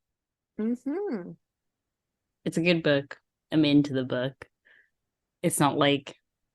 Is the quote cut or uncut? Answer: cut